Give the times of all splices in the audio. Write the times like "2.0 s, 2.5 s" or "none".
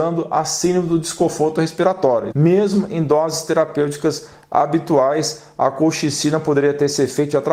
2.3 s